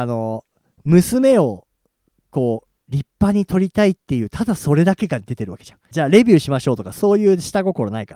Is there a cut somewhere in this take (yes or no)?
yes